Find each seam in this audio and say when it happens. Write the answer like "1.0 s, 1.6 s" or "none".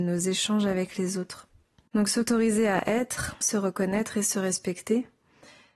1.9 s, 3.4 s